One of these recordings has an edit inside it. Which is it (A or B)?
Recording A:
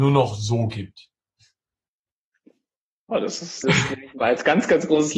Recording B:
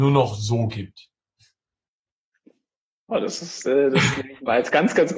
A